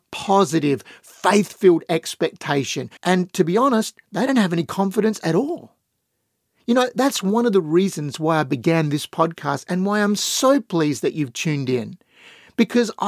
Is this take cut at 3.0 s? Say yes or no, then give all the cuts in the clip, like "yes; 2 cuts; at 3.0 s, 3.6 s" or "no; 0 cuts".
yes; 1 cut; at 3.0 s